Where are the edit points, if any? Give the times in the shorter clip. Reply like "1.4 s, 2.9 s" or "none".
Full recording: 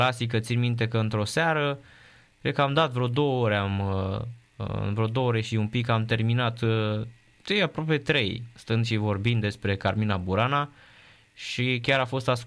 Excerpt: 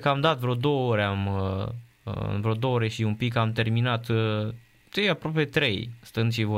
none